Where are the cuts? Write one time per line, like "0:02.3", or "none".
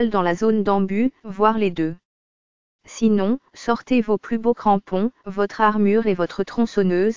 none